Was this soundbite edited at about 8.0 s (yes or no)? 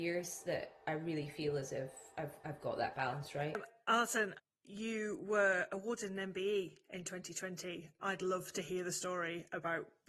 yes